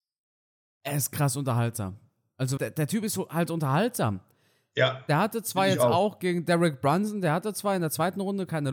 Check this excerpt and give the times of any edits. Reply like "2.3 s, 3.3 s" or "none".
2.6 s